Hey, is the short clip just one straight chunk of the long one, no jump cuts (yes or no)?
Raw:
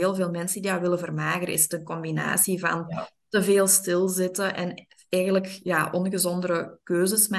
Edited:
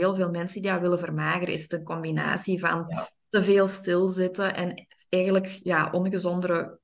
yes